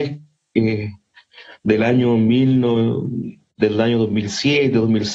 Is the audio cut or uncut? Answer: uncut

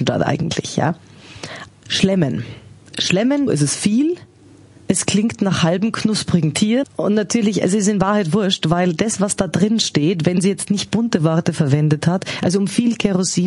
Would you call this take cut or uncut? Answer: cut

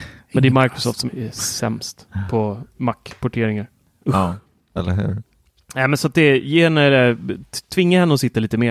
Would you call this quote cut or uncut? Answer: cut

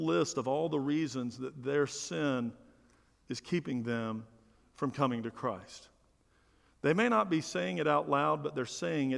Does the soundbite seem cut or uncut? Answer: uncut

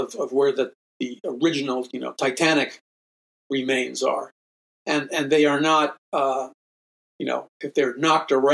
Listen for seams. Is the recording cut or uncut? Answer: uncut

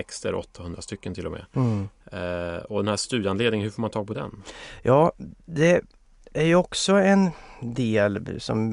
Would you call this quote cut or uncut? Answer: uncut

